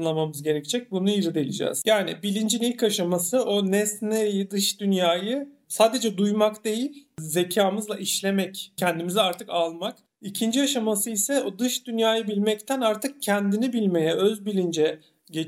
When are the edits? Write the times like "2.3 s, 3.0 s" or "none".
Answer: none